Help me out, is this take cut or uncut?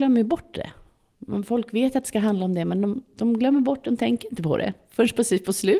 uncut